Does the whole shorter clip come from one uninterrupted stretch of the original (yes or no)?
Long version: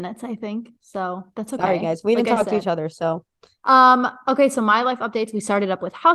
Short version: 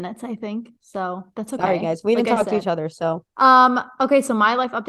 no